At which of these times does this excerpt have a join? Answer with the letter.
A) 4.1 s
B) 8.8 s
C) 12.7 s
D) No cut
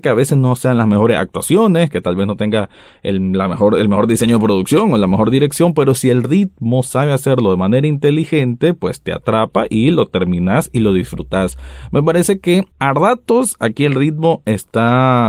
C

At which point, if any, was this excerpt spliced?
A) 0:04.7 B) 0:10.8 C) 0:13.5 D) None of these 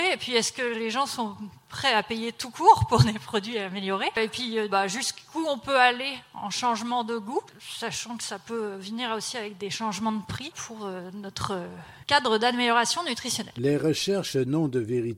A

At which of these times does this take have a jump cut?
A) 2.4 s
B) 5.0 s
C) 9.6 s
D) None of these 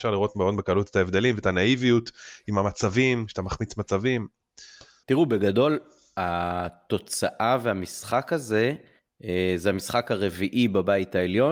B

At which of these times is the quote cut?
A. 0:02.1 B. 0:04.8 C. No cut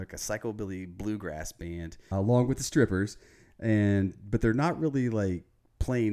A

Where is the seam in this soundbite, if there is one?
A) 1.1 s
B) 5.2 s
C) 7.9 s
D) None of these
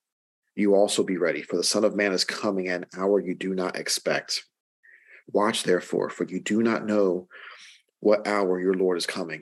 B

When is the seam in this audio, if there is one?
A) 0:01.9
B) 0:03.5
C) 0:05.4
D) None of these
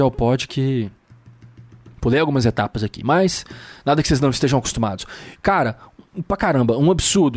C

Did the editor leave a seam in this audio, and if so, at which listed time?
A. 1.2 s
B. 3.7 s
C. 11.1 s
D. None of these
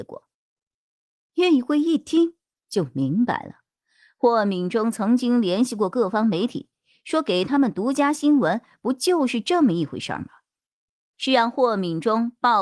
C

